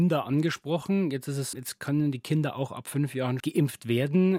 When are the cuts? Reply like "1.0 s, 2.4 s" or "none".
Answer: 1.5 s, 3.4 s